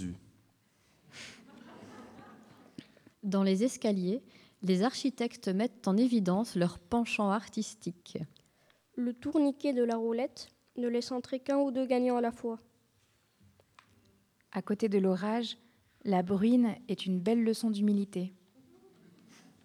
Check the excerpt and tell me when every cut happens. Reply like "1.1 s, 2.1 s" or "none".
3.1 s